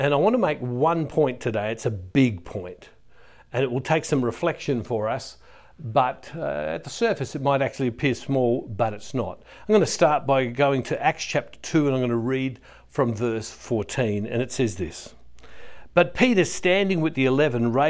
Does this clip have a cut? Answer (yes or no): no